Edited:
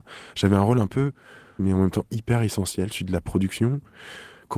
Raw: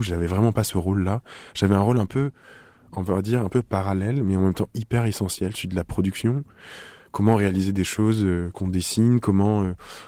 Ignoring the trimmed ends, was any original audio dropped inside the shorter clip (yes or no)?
yes